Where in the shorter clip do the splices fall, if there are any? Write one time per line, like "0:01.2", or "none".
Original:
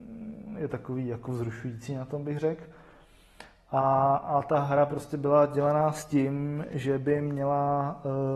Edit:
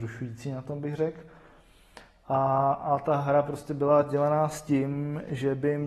none